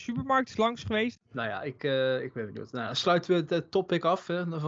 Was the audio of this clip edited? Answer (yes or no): yes